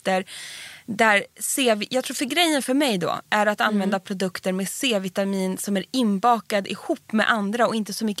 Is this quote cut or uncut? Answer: uncut